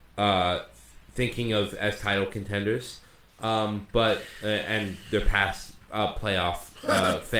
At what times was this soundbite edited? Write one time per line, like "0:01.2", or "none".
0:03.3